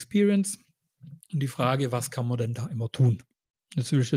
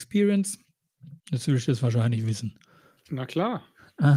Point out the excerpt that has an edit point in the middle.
second; 1 cut; at 1.2 s

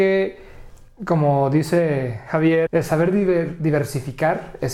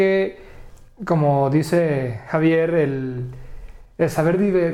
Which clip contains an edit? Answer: first; 1 cut; at 2.7 s

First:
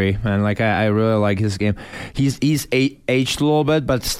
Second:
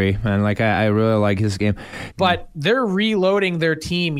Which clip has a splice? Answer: second; 1 cut; at 2.1 s

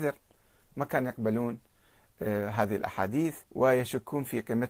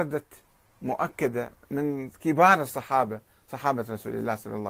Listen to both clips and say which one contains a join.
first; 1 cut; at 3.4 s

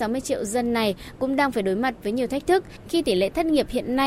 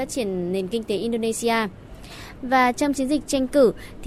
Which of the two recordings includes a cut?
second; 1 cut; at 2.4 s

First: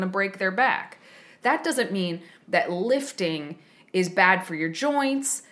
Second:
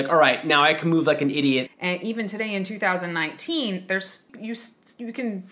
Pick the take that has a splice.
second; 2 cuts; at 1.7 s, 4.3 s

